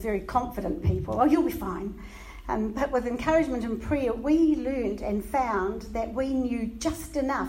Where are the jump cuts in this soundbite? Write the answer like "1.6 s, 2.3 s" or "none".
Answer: none